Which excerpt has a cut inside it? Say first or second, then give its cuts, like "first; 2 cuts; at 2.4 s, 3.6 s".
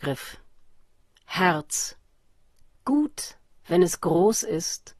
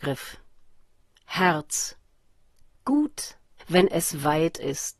second; 1 cut; at 3.6 s